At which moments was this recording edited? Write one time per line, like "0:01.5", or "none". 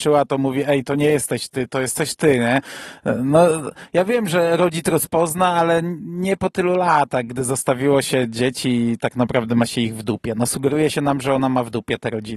none